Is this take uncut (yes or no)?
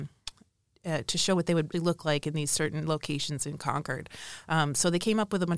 no